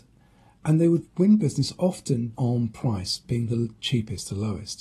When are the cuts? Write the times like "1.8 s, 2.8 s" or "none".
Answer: 2.3 s